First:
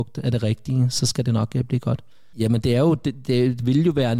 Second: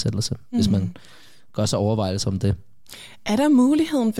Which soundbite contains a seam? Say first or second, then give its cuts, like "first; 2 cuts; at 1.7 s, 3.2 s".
first; 1 cut; at 2.3 s